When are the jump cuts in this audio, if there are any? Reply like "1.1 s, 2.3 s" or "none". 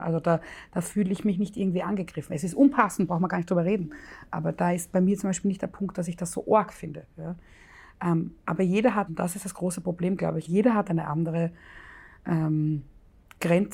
9.1 s, 10.5 s

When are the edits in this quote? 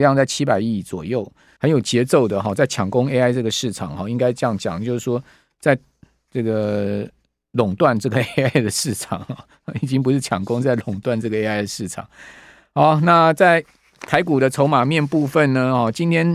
1.6 s

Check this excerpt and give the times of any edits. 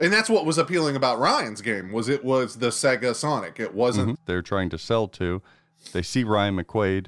4.1 s

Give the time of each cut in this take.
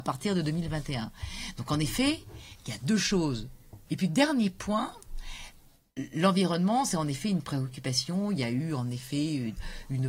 3.9 s

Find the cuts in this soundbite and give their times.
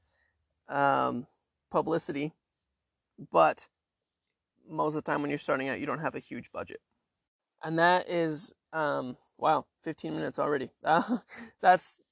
none

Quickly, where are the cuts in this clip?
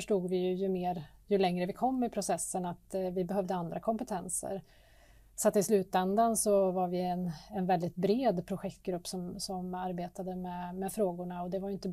none

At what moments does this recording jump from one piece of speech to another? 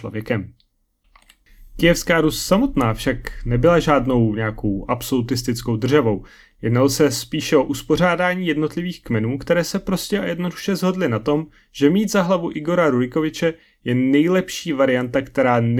none

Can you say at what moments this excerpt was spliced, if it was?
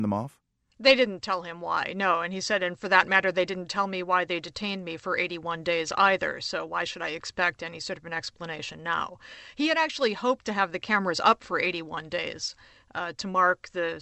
none

